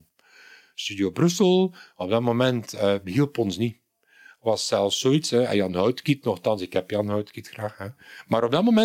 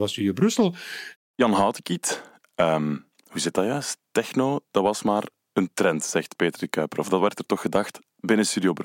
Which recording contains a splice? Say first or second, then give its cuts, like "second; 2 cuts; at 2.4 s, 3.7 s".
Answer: second; 1 cut; at 1.1 s